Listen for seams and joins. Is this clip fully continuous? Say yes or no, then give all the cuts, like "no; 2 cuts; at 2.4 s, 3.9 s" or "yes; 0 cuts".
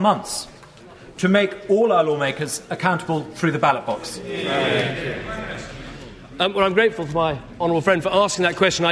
yes; 0 cuts